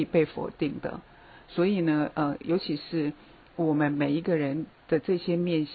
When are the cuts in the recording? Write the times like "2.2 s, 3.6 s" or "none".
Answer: none